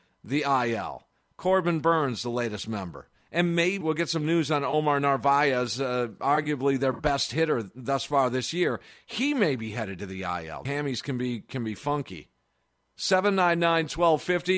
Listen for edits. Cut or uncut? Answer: cut